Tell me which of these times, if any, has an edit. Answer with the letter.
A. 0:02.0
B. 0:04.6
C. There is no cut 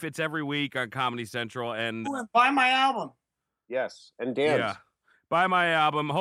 A